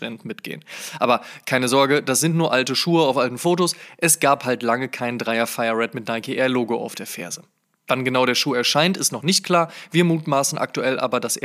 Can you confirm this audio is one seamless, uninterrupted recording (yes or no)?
yes